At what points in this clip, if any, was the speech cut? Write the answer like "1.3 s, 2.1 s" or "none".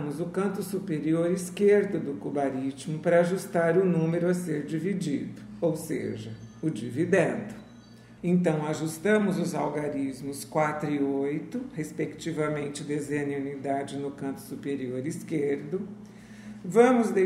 8.2 s